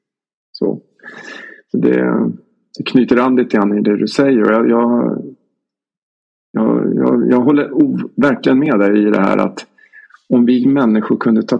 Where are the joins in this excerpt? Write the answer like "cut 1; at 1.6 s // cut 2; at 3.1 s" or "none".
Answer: none